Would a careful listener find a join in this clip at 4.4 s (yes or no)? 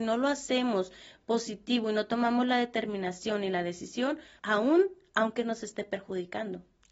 yes